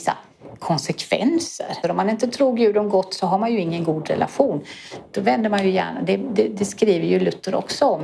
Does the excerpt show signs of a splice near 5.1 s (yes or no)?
no